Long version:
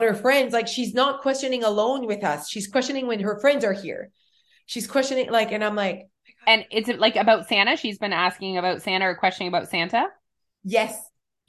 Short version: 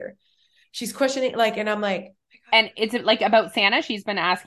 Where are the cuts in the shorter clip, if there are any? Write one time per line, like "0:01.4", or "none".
none